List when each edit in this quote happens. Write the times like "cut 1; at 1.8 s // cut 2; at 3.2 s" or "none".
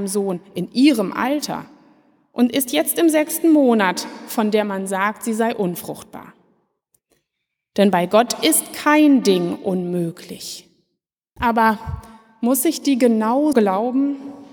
cut 1; at 11.4 s // cut 2; at 13.5 s